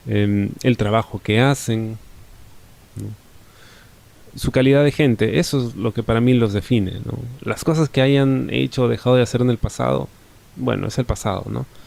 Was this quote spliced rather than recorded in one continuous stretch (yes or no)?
no